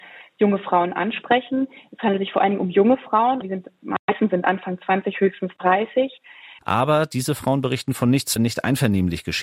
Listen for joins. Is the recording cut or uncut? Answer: cut